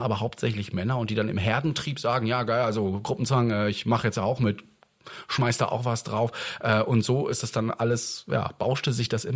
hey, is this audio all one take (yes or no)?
yes